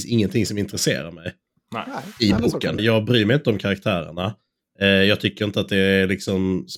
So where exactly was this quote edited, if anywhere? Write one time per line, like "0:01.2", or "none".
0:02.8